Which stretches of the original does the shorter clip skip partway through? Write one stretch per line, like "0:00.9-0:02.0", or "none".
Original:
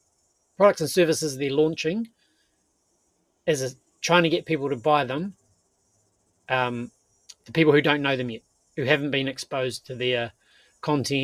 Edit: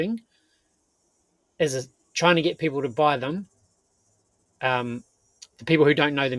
none

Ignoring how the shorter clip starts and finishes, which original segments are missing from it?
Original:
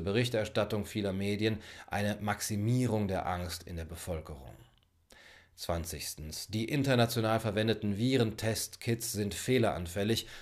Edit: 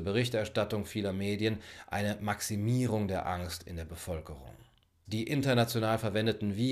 0:05.0-0:06.5

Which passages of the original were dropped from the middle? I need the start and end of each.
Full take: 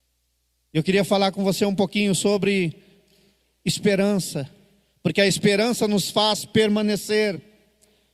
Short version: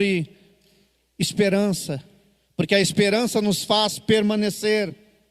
none

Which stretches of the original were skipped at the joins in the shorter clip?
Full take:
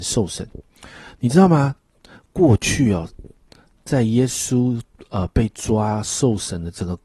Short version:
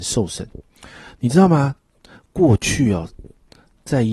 none

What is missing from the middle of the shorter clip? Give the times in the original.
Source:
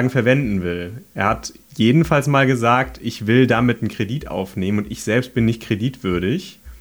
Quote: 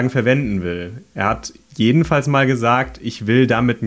none

